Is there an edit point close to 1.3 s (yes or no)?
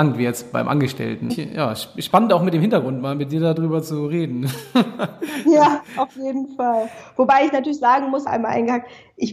yes